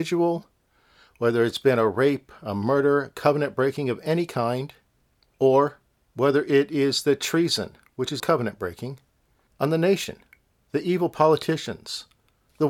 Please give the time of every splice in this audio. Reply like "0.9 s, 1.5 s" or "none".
8.2 s